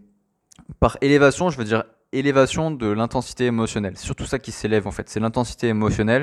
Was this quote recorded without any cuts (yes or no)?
yes